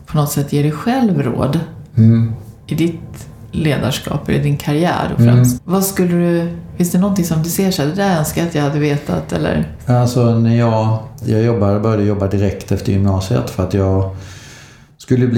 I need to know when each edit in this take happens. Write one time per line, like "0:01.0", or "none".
0:05.6
0:11.2

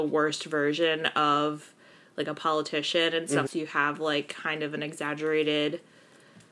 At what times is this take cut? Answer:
0:03.5

